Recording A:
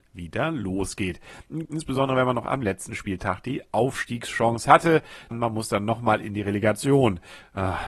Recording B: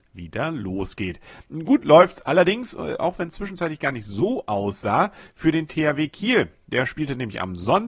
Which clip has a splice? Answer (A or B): A